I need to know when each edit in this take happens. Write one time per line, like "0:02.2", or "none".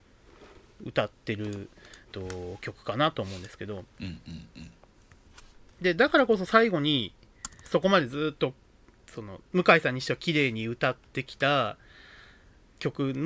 0:02.1